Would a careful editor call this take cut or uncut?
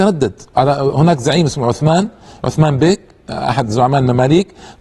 uncut